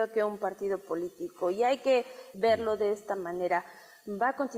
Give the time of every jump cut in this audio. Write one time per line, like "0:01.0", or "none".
0:02.3